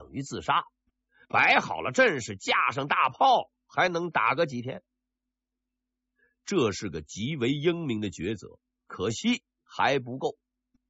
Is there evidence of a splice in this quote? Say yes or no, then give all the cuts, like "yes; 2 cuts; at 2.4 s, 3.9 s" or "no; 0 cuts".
no; 0 cuts